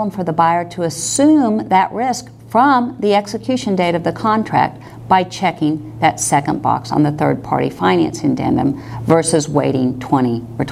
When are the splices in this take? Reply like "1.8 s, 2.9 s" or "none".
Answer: none